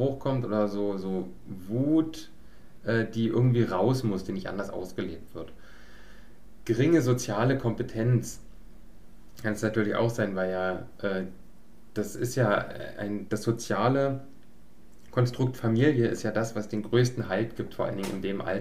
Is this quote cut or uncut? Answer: cut